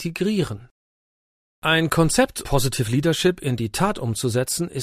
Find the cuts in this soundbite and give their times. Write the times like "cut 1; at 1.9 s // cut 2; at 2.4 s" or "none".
cut 1; at 2.4 s